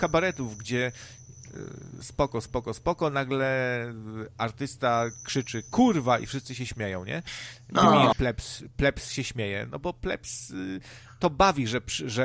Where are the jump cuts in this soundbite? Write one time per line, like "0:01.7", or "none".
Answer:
0:08.1